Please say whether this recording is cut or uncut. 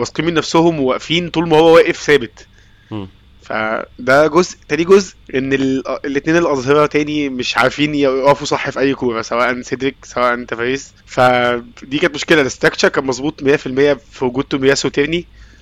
cut